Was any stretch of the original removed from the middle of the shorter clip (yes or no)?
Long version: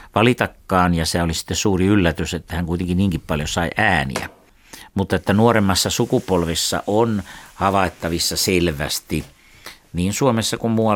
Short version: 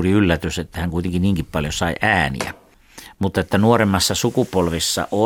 no